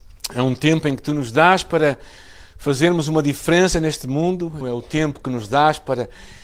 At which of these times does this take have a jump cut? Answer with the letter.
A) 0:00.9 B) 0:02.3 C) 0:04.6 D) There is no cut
C